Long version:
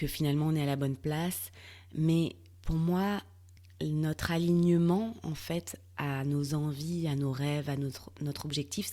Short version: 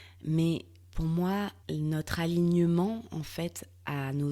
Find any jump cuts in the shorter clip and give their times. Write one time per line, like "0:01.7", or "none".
0:01.6